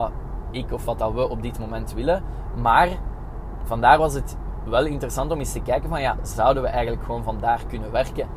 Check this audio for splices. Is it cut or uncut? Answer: uncut